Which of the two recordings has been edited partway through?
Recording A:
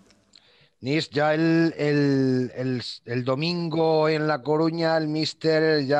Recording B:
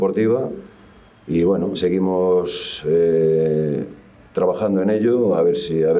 B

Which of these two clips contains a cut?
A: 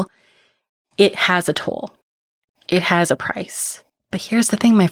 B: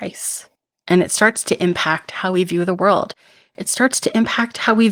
A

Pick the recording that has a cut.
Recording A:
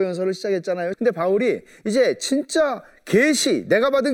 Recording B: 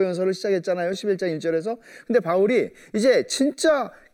A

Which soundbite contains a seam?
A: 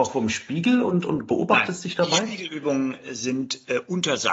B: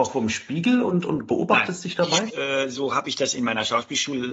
B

